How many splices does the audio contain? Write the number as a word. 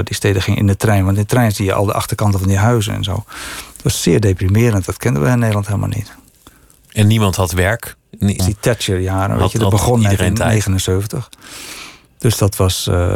one